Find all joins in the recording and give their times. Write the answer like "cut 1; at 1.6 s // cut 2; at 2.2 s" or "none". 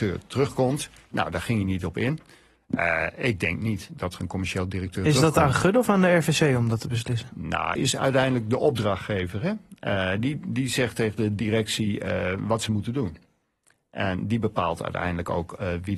cut 1; at 7.8 s